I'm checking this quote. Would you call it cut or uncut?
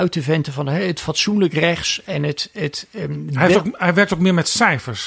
uncut